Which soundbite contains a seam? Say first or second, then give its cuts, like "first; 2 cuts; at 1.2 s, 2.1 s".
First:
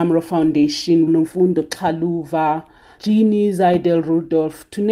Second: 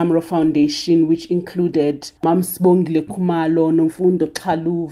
first; 2 cuts; at 1.1 s, 3.0 s